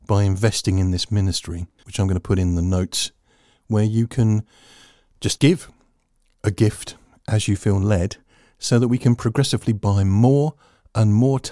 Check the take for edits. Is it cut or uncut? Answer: cut